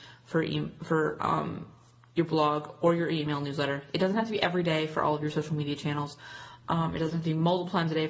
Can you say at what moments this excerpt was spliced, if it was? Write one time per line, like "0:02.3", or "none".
none